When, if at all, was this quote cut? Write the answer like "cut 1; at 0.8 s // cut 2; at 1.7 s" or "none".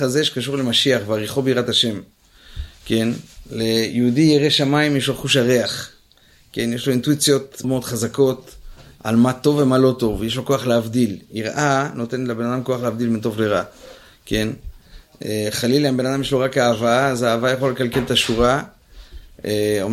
cut 1; at 7.6 s